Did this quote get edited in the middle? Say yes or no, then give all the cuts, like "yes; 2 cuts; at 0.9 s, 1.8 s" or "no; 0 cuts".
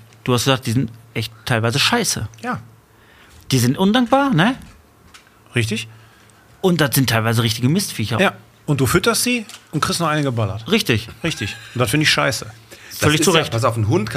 no; 0 cuts